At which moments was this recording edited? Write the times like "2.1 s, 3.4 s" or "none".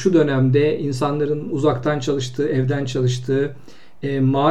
none